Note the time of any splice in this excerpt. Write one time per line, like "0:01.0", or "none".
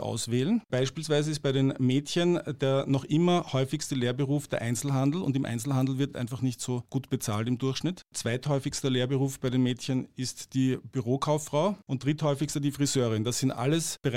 none